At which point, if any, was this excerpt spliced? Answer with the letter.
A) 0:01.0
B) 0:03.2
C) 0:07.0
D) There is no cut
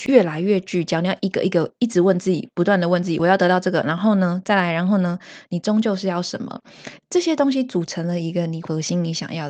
D